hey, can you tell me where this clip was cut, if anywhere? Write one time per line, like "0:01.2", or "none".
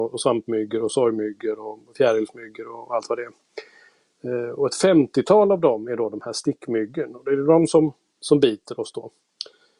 none